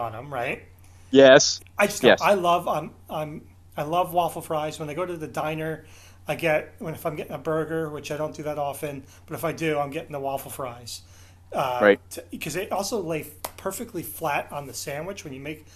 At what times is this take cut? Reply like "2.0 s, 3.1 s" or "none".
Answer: 1.6 s